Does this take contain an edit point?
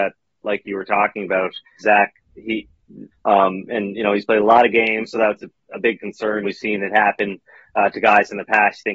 yes; 3 cuts; at 1.8 s, 3.1 s, 6.4 s

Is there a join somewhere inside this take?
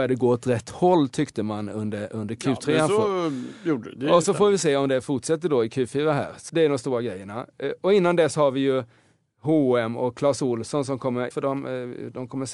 yes; 2 cuts; at 6.5 s, 11.3 s

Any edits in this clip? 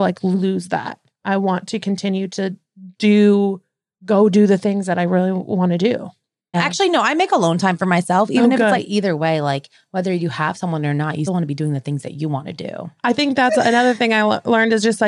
yes; 3 cuts; at 6.5 s, 8.7 s, 11.3 s

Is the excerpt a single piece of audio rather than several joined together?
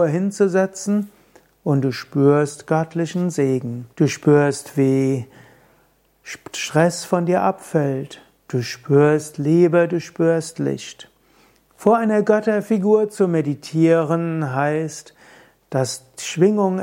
no; 1 cut; at 3.9 s

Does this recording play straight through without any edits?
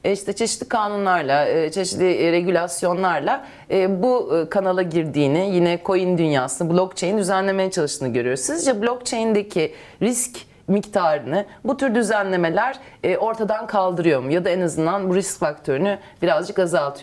yes; 0 cuts

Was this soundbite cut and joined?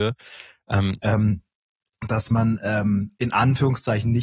yes; 1 cut; at 1.0 s

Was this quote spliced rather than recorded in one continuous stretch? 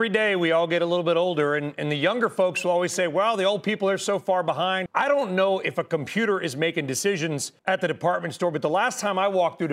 yes; 2 cuts; at 4.9 s, 7.6 s

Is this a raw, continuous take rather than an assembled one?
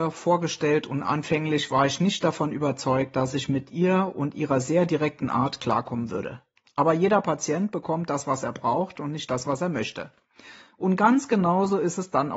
yes; 0 cuts

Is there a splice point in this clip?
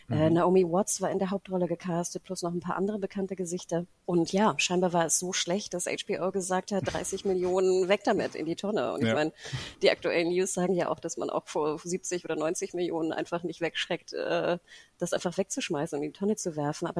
no; 0 cuts

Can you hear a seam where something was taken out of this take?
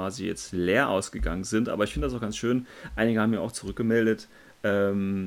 no; 0 cuts

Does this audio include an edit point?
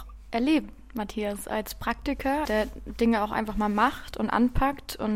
yes; 1 cut; at 2.5 s

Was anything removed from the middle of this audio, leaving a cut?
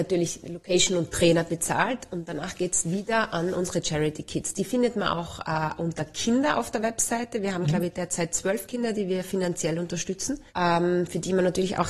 yes; 1 cut; at 10.5 s

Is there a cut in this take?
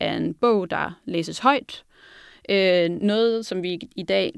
no; 0 cuts

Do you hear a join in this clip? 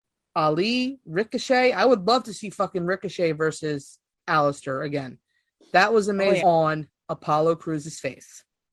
yes; 1 cut; at 6.4 s

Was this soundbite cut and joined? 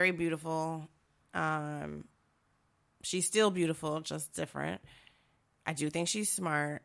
yes; 1 cut; at 1.2 s

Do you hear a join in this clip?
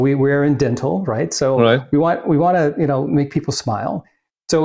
no; 0 cuts

